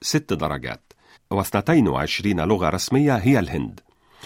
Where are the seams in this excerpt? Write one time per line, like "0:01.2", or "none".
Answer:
0:01.2